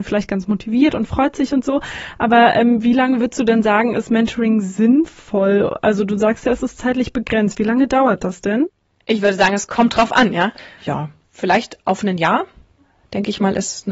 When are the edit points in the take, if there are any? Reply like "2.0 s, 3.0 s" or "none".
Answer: 10.8 s